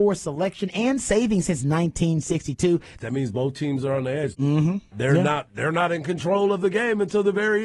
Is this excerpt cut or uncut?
cut